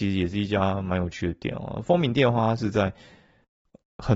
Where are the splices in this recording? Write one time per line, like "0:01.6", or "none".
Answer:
none